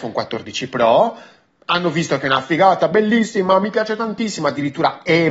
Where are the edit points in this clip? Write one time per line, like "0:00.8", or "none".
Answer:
none